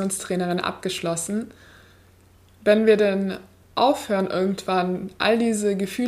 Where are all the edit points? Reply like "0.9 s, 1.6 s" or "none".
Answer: 2.5 s